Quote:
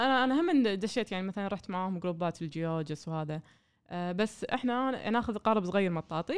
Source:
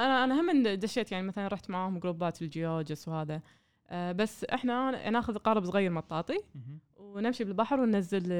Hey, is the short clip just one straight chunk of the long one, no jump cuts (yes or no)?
yes